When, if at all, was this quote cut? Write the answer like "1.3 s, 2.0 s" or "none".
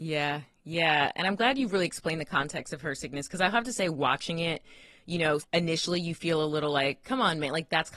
5.4 s